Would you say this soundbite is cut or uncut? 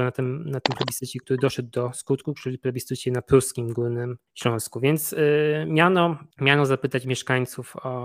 cut